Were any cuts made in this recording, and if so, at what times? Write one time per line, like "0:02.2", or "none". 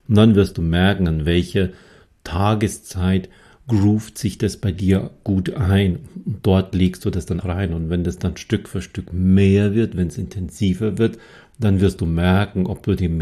0:07.4